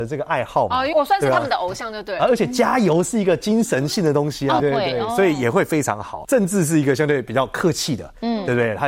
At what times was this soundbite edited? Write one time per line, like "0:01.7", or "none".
0:00.9
0:04.6
0:06.2